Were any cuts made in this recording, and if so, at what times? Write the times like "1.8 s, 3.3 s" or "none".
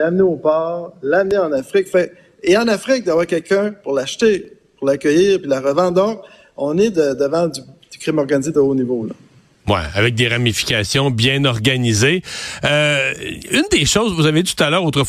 none